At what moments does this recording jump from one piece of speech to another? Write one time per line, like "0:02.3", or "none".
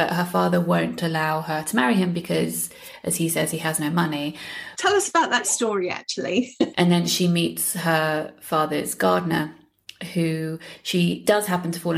0:04.7
0:06.7